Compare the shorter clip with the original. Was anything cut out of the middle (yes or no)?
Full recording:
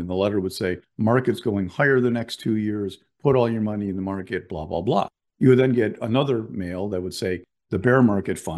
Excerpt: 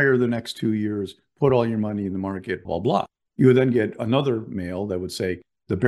yes